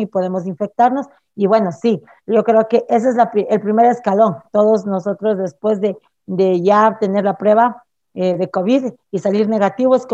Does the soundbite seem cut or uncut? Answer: uncut